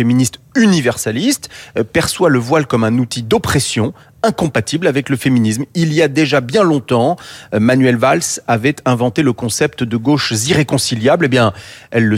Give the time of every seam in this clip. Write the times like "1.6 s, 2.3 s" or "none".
none